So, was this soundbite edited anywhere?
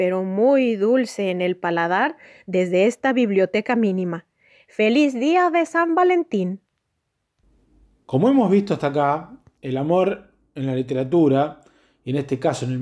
no; 0 cuts

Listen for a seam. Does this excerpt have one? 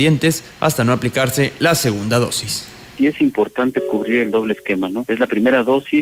no; 0 cuts

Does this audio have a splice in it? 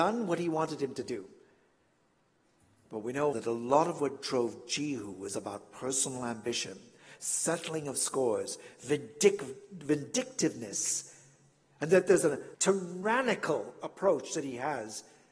yes; 2 cuts; at 3.3 s, 12.5 s

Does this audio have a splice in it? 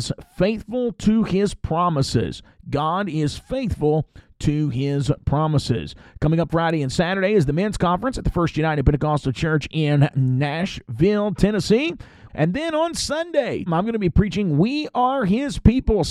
yes; 2 cuts; at 12.3 s, 13.7 s

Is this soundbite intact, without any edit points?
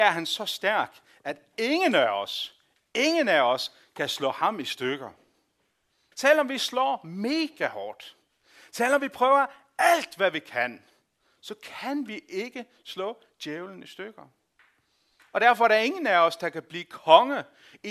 no; 1 cut; at 6.1 s

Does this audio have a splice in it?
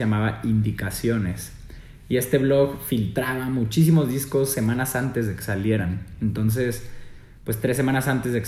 no; 0 cuts

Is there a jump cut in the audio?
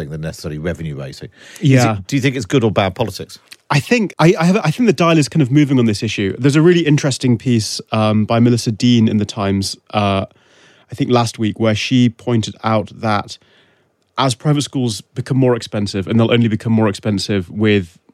yes; 1 cut; at 4.1 s

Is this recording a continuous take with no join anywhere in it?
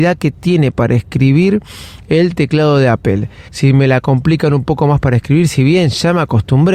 no; 1 cut; at 3.5 s

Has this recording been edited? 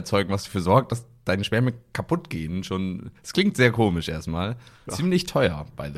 yes; 1 cut; at 4.9 s

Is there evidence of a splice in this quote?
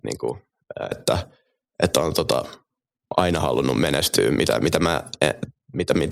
yes; 1 cut; at 0.9 s

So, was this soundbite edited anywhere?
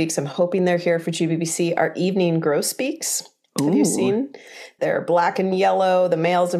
yes; 1 cut; at 4.8 s

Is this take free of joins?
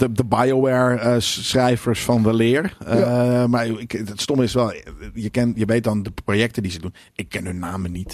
yes; 0 cuts

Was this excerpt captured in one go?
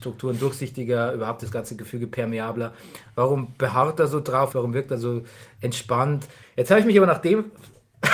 no; 2 cuts; at 4.5 s, 6.4 s

